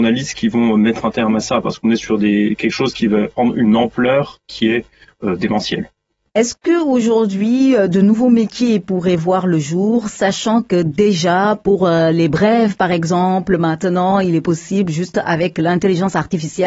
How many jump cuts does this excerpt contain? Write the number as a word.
zero